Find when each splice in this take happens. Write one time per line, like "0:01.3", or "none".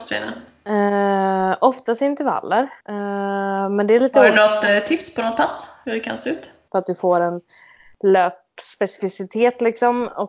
0:02.8
0:06.7